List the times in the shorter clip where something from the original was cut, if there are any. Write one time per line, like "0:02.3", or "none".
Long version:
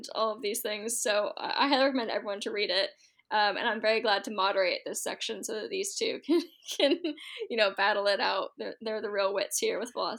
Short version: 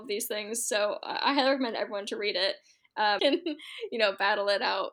0:03.2